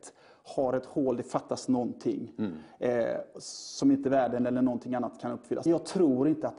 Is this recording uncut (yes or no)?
no